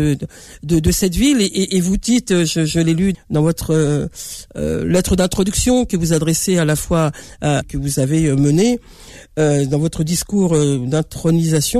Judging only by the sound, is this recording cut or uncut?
cut